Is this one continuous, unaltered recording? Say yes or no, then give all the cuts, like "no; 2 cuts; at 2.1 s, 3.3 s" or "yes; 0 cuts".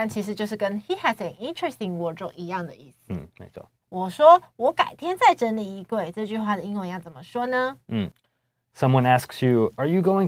no; 1 cut; at 3.8 s